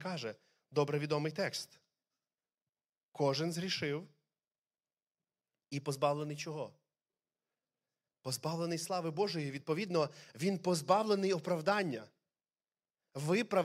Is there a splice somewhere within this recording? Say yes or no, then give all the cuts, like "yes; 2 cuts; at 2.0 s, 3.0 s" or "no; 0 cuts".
no; 0 cuts